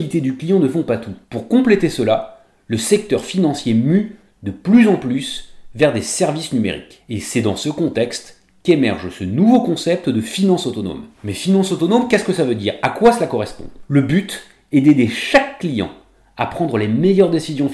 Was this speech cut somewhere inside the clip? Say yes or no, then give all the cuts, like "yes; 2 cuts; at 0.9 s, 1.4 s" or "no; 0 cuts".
no; 0 cuts